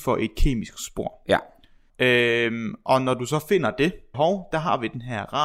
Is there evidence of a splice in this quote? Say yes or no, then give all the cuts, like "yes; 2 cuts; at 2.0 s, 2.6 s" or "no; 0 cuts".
yes; 2 cuts; at 1.9 s, 4.1 s